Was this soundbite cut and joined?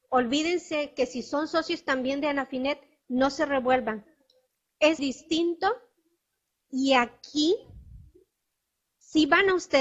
yes; 1 cut; at 5.0 s

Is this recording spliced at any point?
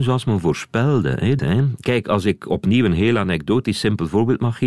yes; 1 cut; at 1.4 s

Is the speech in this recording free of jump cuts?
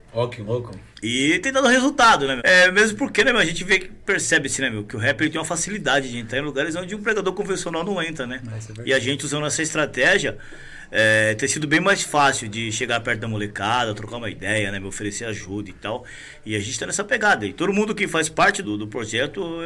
no; 2 cuts; at 2.4 s, 18.6 s

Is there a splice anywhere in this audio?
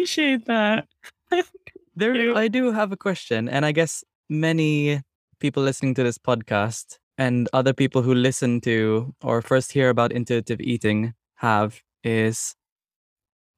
no; 0 cuts

